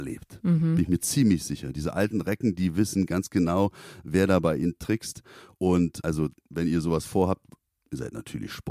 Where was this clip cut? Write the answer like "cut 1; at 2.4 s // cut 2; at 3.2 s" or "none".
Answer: none